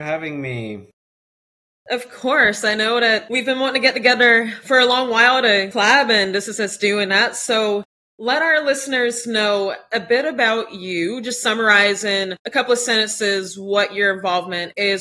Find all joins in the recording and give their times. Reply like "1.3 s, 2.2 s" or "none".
none

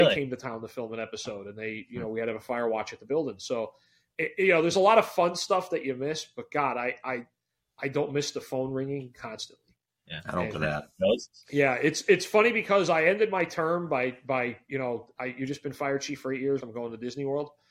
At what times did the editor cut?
10.5 s, 16.6 s

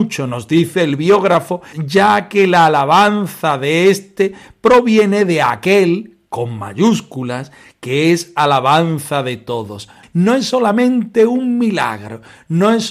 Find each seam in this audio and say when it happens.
1.7 s, 10.0 s

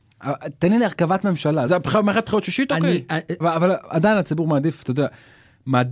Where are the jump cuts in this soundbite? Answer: 1.7 s, 3.4 s

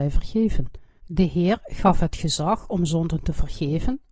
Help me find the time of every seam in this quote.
1.0 s

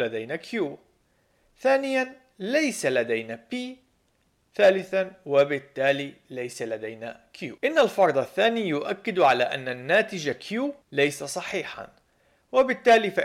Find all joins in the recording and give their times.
7.6 s, 10.8 s

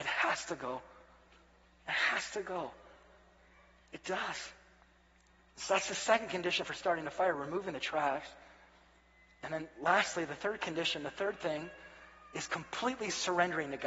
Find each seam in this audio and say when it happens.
none

